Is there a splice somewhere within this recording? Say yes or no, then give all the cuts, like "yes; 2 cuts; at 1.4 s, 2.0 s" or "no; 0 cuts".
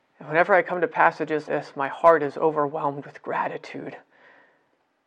yes; 1 cut; at 1.5 s